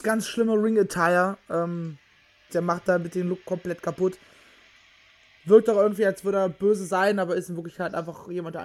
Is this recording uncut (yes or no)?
no